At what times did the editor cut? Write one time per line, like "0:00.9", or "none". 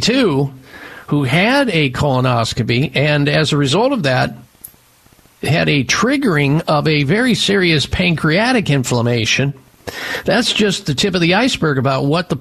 none